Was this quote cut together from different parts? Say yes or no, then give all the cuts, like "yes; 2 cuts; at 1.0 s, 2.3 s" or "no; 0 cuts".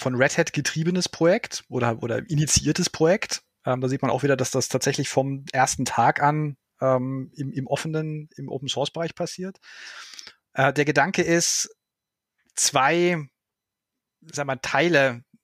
no; 0 cuts